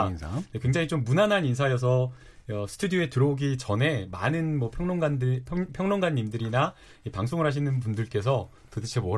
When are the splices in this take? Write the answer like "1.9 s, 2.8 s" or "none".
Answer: none